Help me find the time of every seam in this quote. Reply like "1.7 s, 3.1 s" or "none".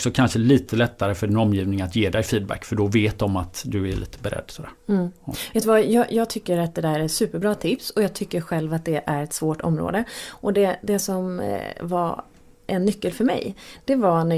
none